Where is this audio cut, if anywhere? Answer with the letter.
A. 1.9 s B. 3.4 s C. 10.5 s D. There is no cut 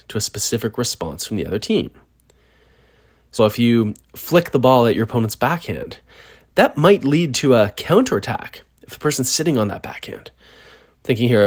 B